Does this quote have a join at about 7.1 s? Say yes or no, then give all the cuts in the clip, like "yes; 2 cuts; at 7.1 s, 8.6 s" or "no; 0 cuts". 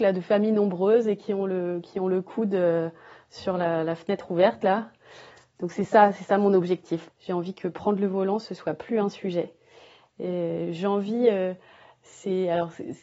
yes; 1 cut; at 7.1 s